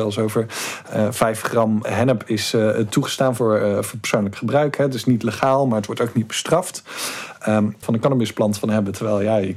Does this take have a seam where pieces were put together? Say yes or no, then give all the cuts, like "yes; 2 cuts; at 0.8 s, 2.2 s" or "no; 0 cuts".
yes; 1 cut; at 7.8 s